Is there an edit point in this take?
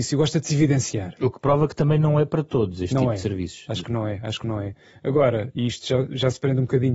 no; 0 cuts

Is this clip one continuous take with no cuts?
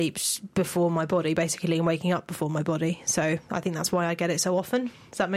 yes; 0 cuts

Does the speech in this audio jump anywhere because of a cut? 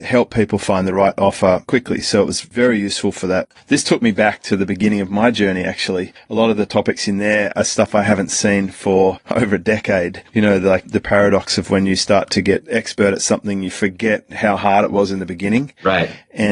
no; 0 cuts

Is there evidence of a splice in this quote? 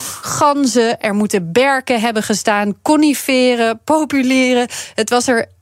no; 0 cuts

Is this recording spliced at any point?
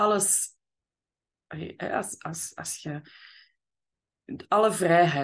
no; 0 cuts

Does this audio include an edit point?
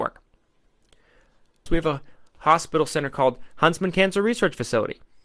yes; 1 cut; at 1.7 s

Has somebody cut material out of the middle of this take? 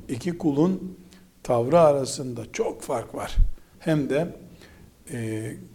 yes; 1 cut; at 3.7 s

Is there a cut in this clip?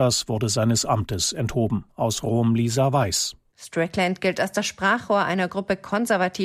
yes; 1 cut; at 3.5 s

